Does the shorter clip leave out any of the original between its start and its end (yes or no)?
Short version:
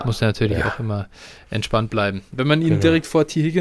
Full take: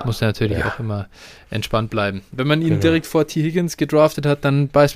no